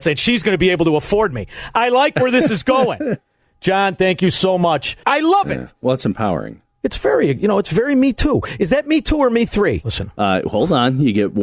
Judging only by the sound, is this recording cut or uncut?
cut